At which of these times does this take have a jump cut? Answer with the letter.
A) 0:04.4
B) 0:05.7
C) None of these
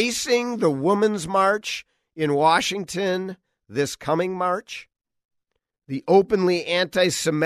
B